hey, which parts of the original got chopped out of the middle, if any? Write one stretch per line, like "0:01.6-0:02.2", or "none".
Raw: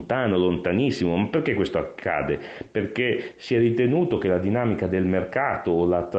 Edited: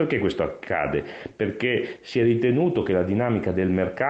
none